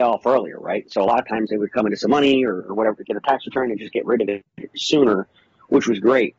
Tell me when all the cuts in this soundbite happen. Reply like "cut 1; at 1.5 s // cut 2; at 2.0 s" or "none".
none